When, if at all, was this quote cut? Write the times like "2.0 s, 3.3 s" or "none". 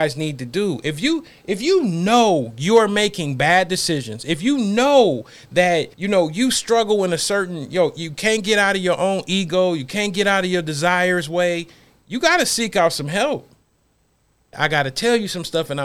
5.9 s, 14.5 s